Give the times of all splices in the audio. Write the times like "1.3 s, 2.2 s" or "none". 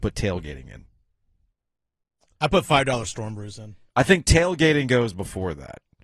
3.9 s